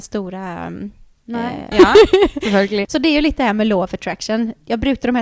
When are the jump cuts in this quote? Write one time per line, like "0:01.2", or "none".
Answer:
0:01.7
0:02.8